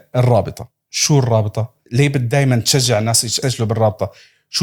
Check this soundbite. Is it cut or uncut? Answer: cut